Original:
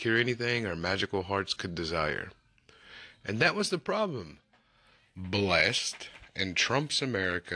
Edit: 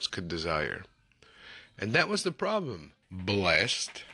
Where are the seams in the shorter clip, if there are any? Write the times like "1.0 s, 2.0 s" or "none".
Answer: 3.0 s